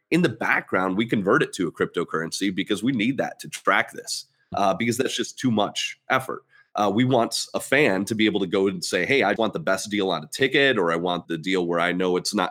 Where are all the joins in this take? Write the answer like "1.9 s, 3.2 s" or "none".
4.5 s, 9.4 s, 11.2 s